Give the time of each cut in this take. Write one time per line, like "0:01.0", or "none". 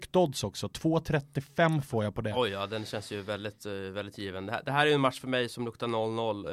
none